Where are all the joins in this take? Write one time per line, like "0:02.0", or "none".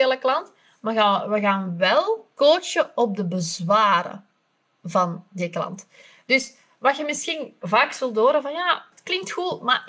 none